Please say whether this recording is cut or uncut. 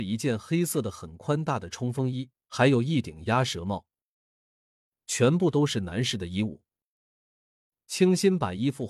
cut